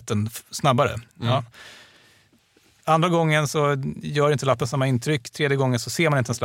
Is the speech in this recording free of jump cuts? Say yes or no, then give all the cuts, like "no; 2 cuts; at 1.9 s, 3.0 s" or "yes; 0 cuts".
yes; 0 cuts